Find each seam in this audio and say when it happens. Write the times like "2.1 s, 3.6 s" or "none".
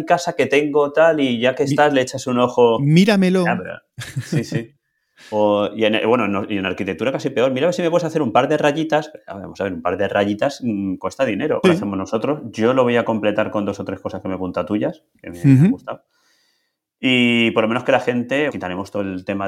11.6 s, 18.5 s

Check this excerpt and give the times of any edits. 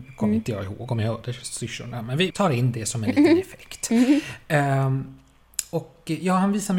2.3 s

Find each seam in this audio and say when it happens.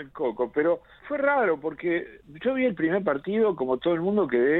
1.0 s

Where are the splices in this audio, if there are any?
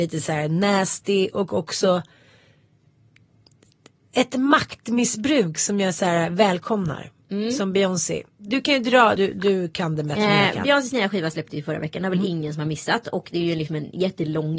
9.2 s

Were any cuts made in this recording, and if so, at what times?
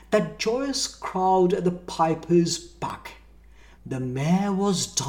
3.8 s

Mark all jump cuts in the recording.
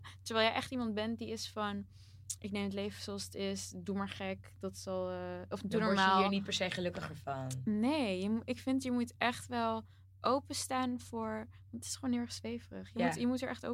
none

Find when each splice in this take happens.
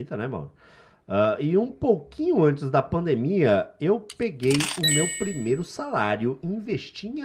none

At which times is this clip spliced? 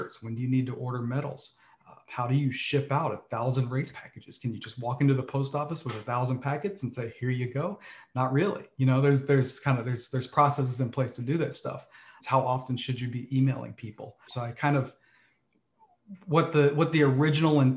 12.2 s, 14.3 s

